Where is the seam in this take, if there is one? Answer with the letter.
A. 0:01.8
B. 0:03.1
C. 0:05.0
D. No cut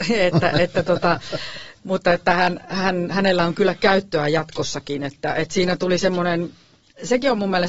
A